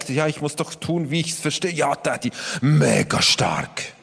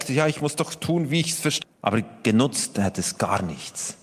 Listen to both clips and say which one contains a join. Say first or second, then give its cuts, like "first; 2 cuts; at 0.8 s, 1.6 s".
second; 1 cut; at 1.6 s